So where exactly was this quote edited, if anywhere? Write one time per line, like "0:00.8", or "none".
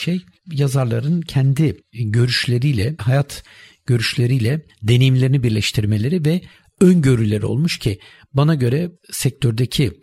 0:03.0

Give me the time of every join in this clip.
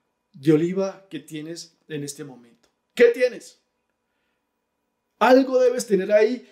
none

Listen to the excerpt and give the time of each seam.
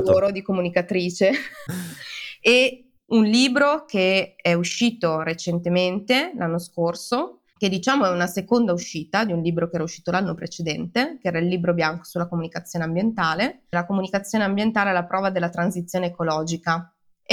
0:01.7
0:07.5
0:13.7

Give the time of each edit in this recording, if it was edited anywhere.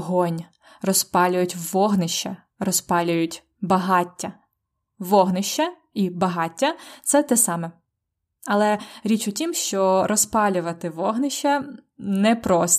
none

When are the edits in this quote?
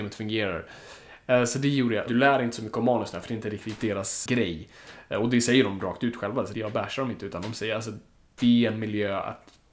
0:02.1
0:04.3
0:06.5

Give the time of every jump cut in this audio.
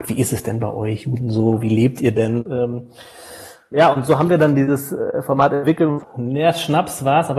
0:02.4
0:06.0

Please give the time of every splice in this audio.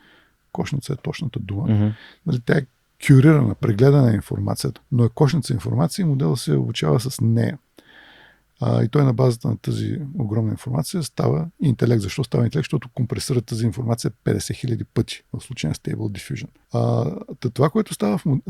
0:04.8
0:16.6

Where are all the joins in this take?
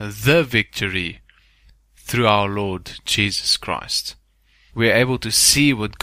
0:04.7

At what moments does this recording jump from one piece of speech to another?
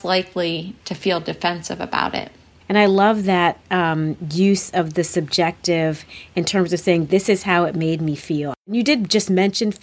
0:02.6

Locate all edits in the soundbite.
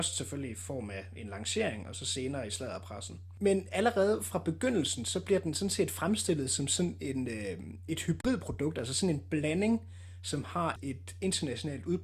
0:10.8

